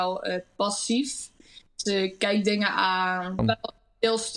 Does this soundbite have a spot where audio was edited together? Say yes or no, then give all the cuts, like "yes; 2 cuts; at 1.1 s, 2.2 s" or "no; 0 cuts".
yes; 1 cut; at 3.4 s